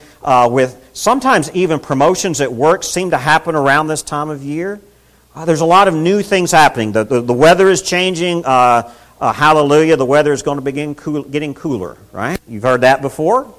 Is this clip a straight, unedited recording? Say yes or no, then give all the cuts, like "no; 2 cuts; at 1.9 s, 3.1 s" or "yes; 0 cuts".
no; 1 cut; at 12.5 s